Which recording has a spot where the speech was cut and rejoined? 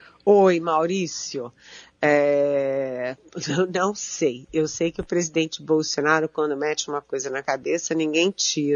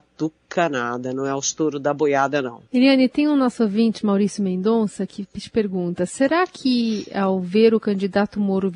second; 1 cut; at 2.7 s

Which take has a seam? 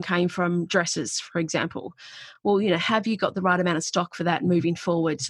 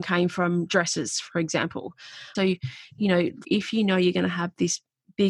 second; 2 cuts; at 2.4 s, 3.4 s

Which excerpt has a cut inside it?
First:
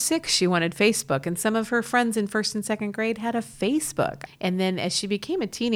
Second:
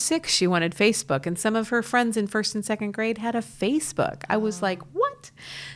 first; 1 cut; at 4.3 s

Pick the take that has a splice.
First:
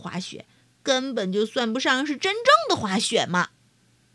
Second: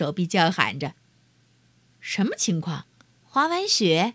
second; 1 cut; at 3.2 s

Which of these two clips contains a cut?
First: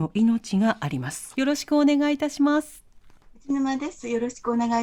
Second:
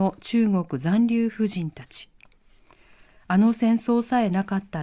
first; 1 cut; at 1.3 s

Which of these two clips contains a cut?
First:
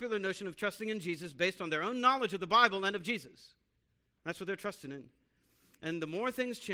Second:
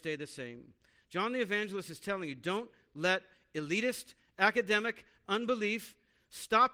first; 1 cut; at 4.1 s

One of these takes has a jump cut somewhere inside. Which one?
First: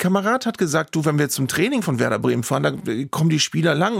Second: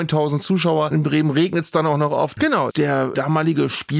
second; 1 cut; at 2.4 s

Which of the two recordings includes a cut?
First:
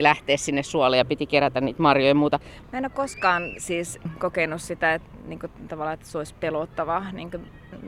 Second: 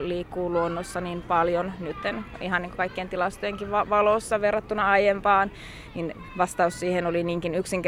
first; 1 cut; at 2.6 s

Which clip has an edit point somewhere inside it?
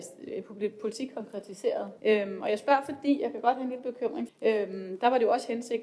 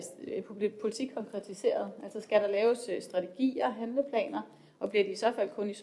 first; 2 cuts; at 2.0 s, 4.3 s

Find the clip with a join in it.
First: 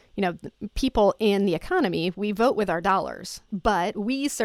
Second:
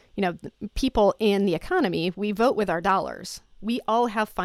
first; 1 cut; at 3.5 s

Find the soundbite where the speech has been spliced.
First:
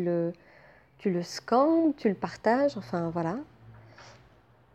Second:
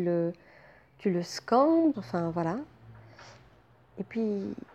second; 1 cut; at 1.9 s

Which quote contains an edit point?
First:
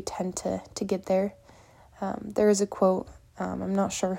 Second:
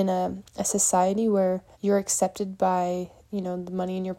second; 1 cut; at 1.7 s

